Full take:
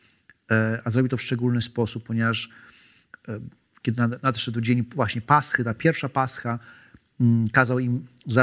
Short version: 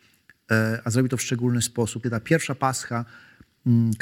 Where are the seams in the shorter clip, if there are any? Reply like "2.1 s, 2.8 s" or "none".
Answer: 2.0 s